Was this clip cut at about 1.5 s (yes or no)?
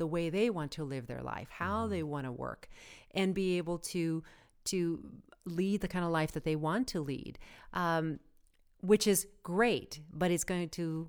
yes